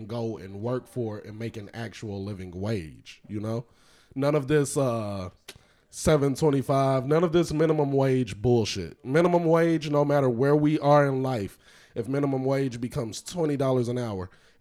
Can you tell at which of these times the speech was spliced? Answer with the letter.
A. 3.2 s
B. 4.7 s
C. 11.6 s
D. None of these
D